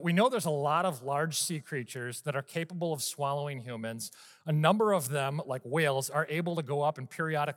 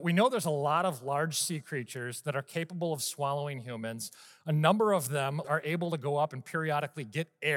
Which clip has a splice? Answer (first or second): second